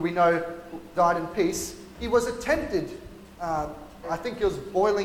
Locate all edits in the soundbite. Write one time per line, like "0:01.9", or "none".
0:00.9
0:04.0

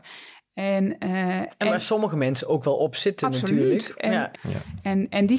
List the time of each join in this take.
0:04.3

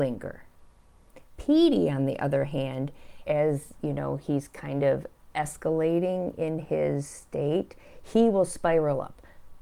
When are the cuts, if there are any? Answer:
0:03.2
0:05.3

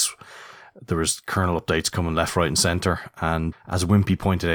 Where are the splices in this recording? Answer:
0:03.5

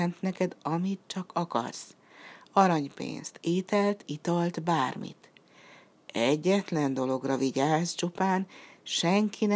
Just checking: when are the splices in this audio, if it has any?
none

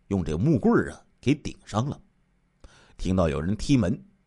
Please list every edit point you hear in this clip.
none

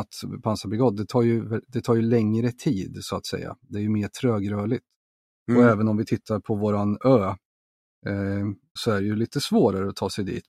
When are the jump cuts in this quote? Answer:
0:08.8

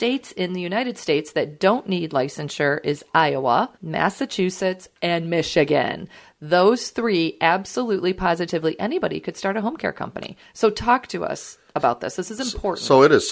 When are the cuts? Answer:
0:03.8

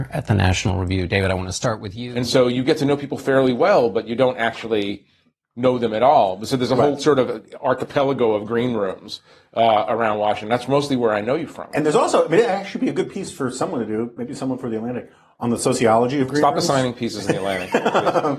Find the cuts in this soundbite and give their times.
none

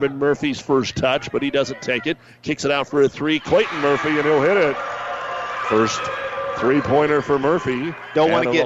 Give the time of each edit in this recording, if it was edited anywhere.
none

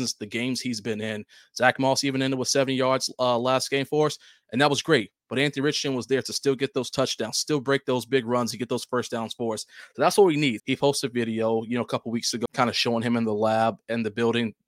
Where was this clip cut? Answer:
0:10.6
0:12.5

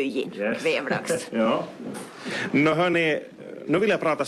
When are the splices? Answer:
0:01.3

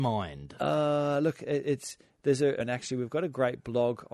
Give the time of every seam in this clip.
0:02.6

